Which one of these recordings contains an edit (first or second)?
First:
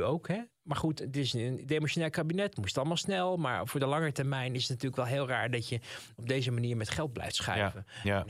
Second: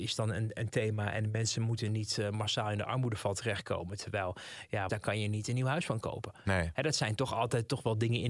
second